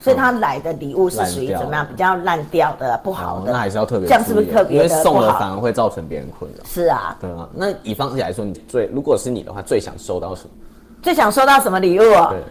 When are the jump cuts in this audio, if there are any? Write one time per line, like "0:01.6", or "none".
0:08.5